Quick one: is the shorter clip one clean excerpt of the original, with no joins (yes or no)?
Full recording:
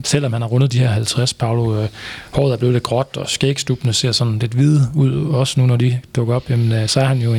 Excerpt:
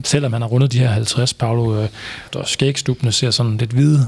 no